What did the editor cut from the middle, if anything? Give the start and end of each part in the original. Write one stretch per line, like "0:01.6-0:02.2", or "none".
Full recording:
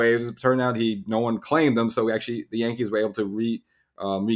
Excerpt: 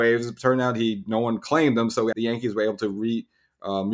0:02.1-0:02.5